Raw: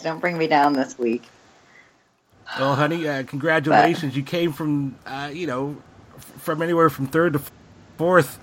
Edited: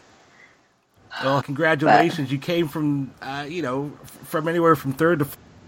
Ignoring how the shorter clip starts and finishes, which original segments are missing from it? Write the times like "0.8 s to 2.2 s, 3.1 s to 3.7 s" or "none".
2.8 s to 3.3 s, 5.8 s to 6.1 s